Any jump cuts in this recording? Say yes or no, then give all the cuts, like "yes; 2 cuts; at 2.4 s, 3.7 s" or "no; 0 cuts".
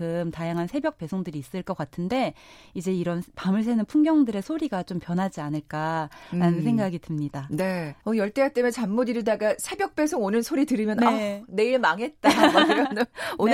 yes; 1 cut; at 8.0 s